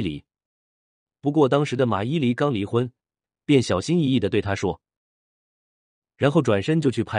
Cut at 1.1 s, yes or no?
no